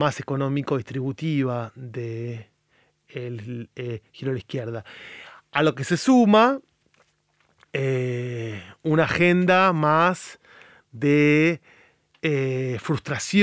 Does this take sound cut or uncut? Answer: uncut